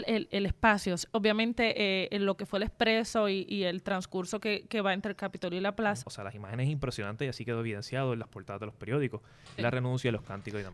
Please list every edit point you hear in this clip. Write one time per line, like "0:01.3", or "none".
0:06.0
0:09.6